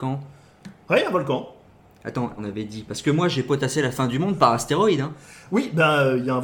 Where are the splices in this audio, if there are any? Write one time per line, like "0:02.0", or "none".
0:02.4

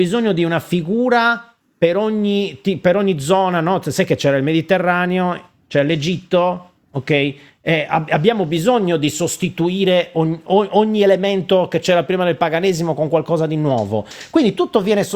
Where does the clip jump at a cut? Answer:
none

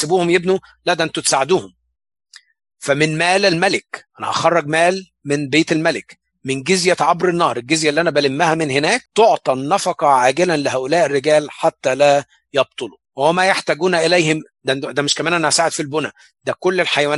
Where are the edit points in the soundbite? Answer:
0:04.1
0:09.1
0:13.0

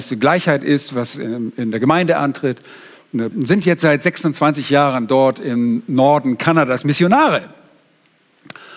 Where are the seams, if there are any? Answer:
0:03.3

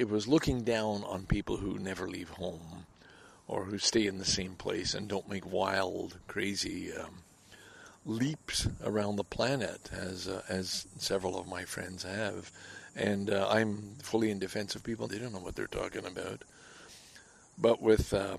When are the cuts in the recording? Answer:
0:15.1

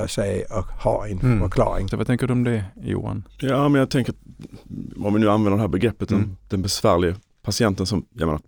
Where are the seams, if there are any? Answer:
0:01.9

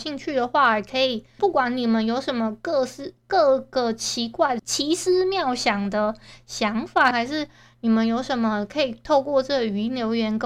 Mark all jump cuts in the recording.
0:01.4
0:04.6
0:07.1

